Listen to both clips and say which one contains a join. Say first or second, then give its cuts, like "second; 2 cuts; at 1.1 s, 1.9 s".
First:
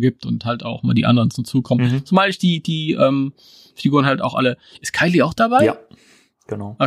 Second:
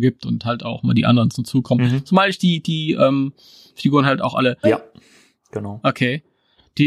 second; 1 cut; at 4.6 s